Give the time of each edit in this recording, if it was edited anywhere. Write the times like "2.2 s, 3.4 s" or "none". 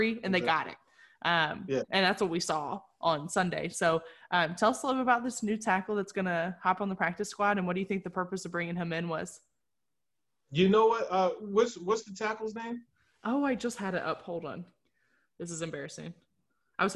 none